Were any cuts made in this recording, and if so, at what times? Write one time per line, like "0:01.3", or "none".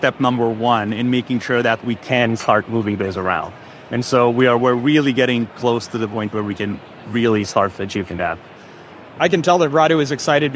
none

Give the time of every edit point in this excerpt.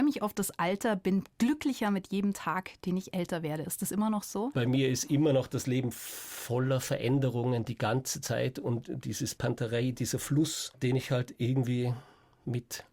0:04.5

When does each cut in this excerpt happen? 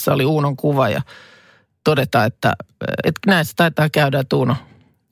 0:03.0

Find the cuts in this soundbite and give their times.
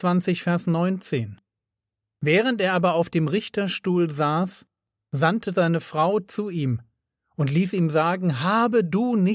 none

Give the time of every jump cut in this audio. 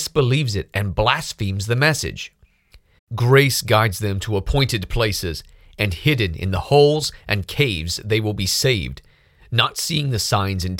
0:03.0

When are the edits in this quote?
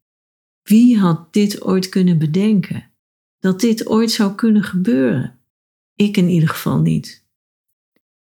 none

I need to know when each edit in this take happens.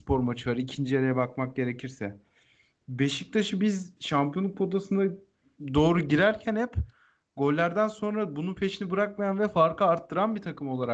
none

